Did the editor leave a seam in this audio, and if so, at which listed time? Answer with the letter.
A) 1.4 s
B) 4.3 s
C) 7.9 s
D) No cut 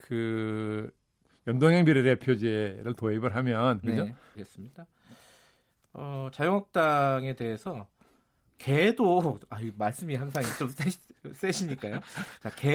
B